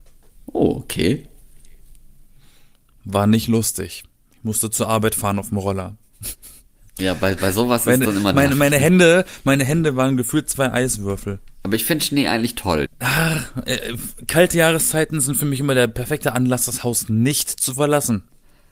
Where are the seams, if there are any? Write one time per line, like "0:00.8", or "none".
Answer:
0:12.9